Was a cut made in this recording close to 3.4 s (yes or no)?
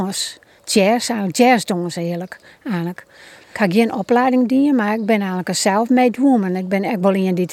yes